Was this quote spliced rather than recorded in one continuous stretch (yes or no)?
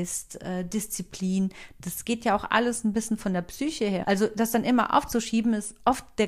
yes